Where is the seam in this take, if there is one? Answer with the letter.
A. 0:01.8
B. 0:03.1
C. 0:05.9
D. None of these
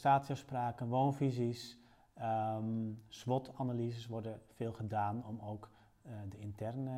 D